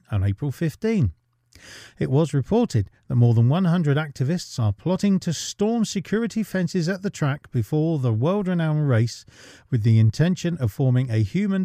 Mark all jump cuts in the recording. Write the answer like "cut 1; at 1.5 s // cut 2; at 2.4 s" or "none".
none